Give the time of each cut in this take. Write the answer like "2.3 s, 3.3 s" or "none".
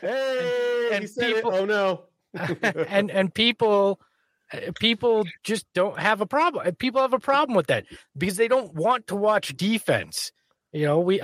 none